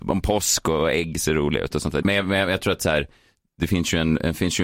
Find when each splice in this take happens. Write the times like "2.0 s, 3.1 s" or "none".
2.0 s